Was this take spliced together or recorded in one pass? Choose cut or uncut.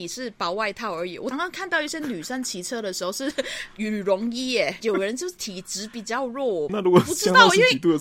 cut